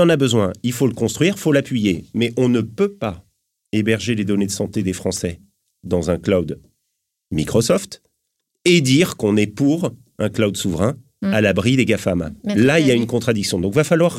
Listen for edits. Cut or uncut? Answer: uncut